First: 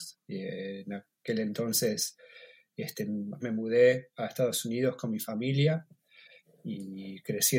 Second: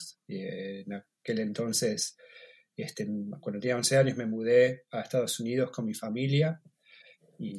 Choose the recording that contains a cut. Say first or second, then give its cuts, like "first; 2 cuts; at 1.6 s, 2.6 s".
first; 1 cut; at 3.4 s